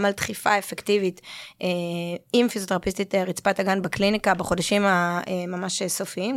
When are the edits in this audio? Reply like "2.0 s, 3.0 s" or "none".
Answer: none